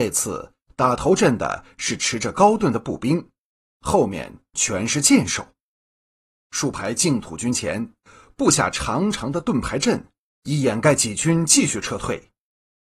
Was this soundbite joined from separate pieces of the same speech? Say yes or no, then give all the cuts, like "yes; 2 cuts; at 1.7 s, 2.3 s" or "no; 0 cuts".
no; 0 cuts